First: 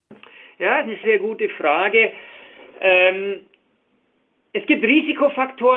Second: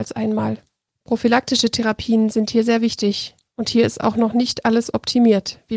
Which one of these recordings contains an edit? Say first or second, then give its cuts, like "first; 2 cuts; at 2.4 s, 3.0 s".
first; 1 cut; at 1.0 s